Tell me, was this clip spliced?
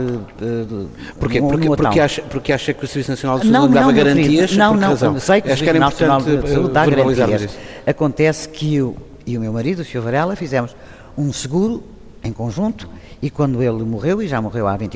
no; 0 cuts

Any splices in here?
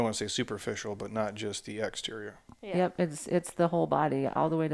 no; 0 cuts

